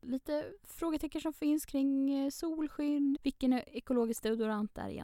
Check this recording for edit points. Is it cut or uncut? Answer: cut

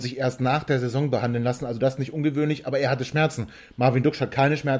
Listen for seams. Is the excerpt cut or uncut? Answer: uncut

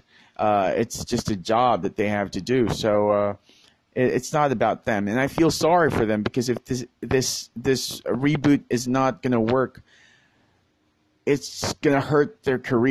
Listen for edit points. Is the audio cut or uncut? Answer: uncut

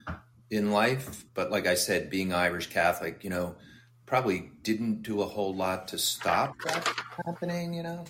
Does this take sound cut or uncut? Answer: cut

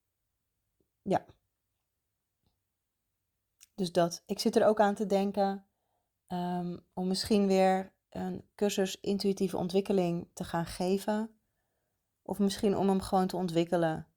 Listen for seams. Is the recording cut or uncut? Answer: cut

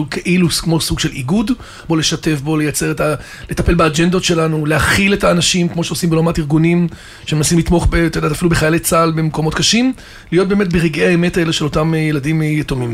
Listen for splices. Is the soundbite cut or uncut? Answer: cut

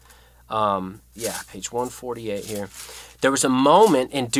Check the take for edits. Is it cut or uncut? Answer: cut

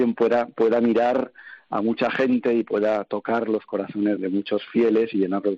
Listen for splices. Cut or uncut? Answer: cut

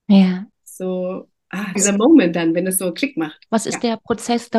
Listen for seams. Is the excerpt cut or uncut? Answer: cut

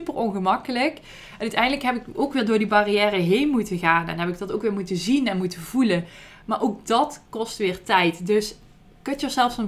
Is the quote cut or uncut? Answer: uncut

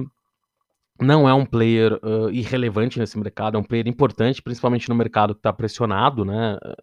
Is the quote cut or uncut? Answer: uncut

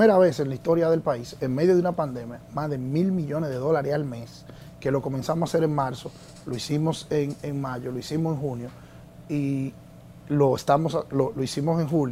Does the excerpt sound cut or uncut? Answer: uncut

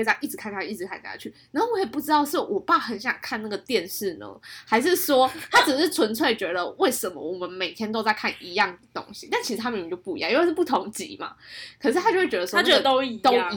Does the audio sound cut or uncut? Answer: uncut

